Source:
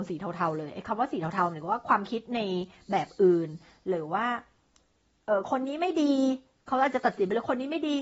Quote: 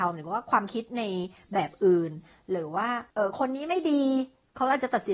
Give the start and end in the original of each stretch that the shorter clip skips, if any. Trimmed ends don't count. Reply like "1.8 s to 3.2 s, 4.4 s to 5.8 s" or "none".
4.5 s to 5.2 s